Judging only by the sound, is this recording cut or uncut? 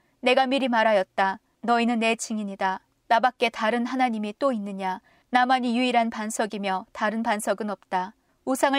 uncut